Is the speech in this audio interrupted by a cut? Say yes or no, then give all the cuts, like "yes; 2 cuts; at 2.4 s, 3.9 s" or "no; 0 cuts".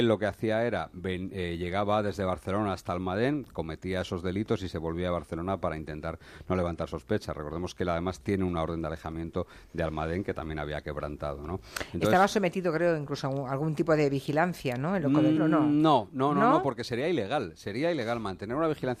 yes; 1 cut; at 15.4 s